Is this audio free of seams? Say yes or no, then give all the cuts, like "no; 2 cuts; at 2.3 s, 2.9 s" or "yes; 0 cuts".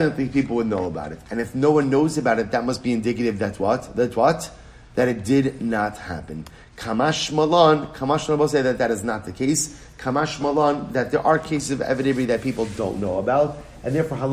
yes; 0 cuts